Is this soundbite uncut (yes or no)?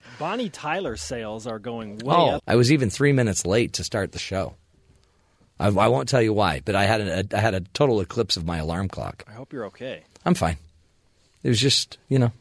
no